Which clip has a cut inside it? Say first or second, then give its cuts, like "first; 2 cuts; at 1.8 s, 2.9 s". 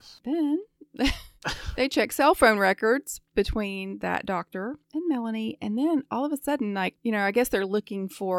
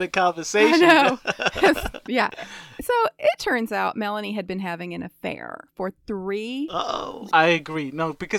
second; 1 cut; at 7.3 s